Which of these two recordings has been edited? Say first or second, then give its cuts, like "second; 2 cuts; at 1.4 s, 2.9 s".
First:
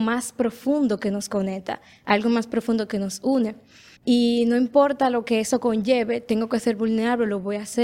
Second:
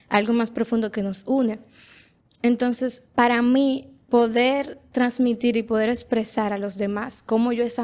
first; 1 cut; at 4.0 s